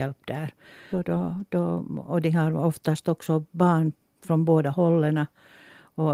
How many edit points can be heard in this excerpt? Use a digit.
1